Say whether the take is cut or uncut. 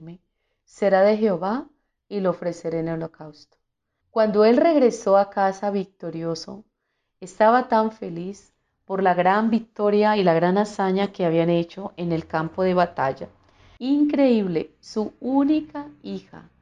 cut